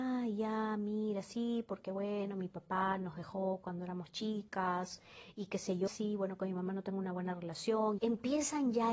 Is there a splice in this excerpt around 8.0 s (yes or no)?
yes